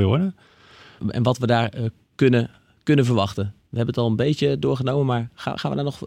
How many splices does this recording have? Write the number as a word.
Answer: one